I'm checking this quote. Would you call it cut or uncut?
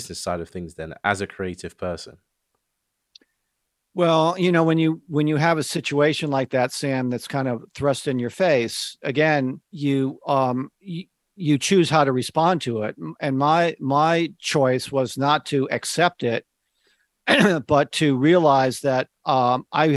cut